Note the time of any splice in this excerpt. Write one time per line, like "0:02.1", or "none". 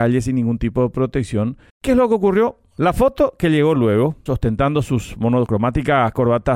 0:01.7
0:04.3